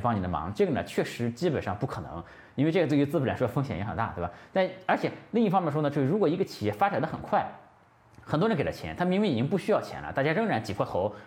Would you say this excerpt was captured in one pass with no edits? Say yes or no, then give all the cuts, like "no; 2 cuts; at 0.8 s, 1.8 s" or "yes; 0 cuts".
yes; 0 cuts